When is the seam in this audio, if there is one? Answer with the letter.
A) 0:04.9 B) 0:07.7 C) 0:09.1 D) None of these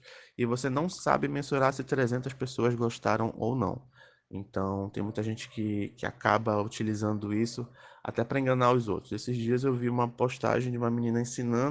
D